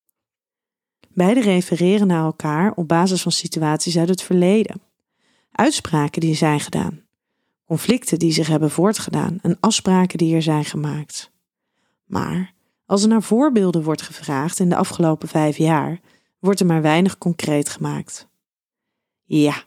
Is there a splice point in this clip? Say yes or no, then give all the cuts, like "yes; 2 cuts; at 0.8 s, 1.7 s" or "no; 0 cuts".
yes; 1 cut; at 1.0 s